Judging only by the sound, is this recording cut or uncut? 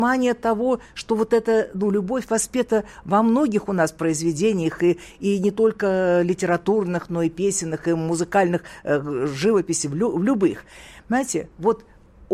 uncut